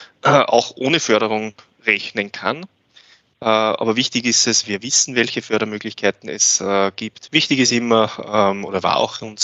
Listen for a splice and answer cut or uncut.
cut